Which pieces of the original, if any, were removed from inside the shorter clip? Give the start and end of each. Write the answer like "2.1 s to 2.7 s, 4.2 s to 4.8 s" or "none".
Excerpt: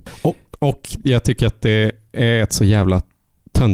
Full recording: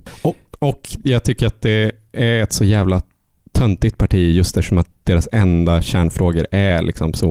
none

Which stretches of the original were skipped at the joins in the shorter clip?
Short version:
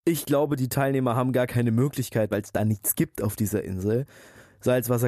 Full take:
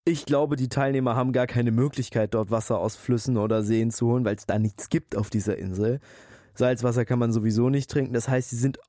2.3 s to 4.2 s

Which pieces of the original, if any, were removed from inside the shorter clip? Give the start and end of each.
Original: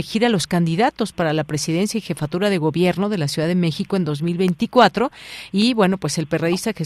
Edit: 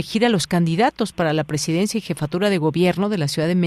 none

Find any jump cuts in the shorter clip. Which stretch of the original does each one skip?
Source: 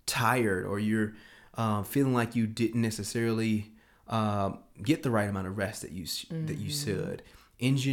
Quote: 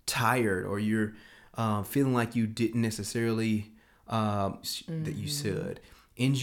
4.6 s to 6.0 s

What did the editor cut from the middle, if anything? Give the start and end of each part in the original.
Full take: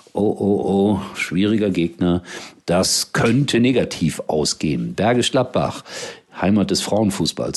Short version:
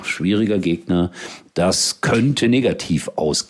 none

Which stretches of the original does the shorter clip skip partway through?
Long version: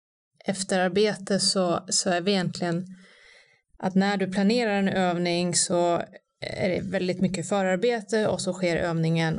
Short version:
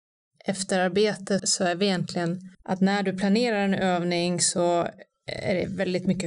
1.4 s to 1.8 s, 3.0 s to 3.7 s

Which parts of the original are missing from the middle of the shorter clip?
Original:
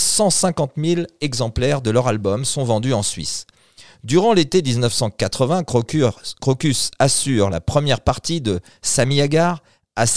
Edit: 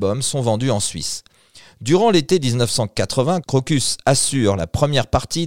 5.7 s to 6.4 s

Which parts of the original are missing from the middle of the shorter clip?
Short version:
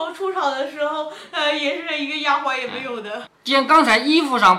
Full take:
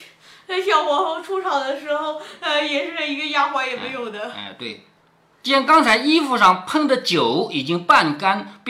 4.3 s to 5.2 s

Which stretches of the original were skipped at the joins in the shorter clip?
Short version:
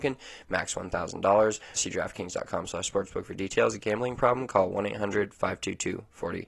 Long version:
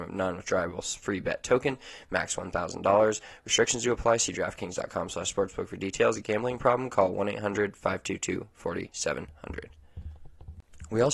3.4 s to 4.2 s

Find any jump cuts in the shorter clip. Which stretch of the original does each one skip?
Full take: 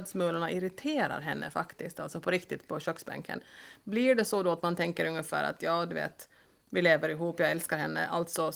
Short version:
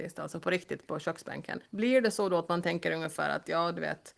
3.5 s to 3.8 s

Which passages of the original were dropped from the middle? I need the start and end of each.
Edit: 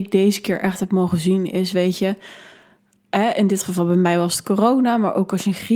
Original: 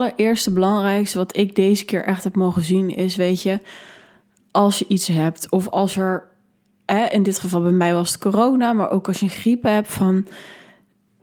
4.4 s to 6.7 s

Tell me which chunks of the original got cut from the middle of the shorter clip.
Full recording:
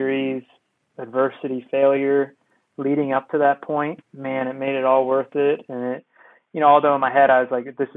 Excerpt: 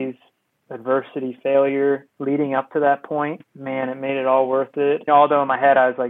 2.4 s to 2.7 s, 5.7 s to 6.6 s

